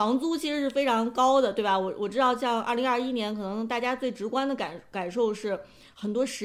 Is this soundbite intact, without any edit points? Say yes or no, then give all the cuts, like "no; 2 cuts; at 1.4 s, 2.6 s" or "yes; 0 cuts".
yes; 0 cuts